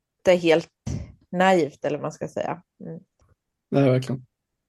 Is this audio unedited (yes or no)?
yes